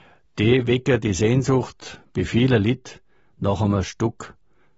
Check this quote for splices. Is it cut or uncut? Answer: uncut